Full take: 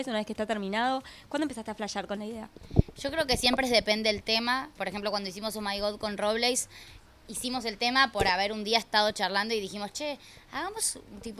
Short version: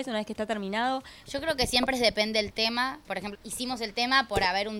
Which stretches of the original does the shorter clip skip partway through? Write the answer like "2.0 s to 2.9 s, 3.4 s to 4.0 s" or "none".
1.2 s to 2.9 s, 5.0 s to 7.2 s